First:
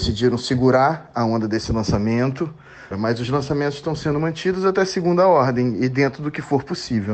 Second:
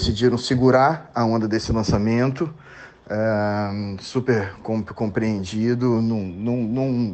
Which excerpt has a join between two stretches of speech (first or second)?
first